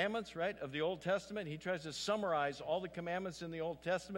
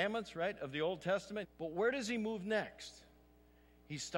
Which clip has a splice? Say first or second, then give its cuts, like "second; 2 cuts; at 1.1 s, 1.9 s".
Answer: second; 1 cut; at 1.4 s